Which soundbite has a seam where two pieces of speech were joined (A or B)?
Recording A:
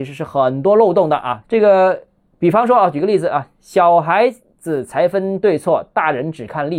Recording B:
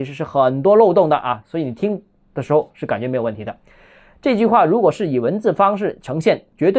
A